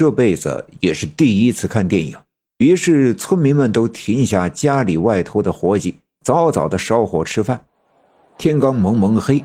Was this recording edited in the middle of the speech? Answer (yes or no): yes